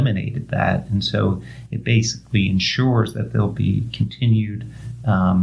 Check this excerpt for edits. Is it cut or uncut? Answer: uncut